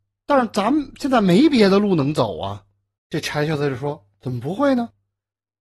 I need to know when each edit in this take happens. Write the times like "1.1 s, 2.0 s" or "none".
3.0 s